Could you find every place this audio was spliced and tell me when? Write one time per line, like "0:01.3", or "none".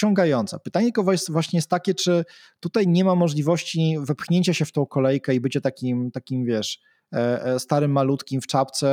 none